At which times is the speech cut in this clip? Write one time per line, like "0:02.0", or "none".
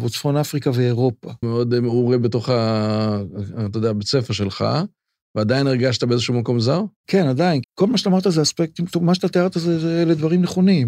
0:01.4
0:07.6